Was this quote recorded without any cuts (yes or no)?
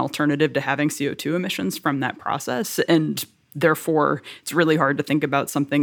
yes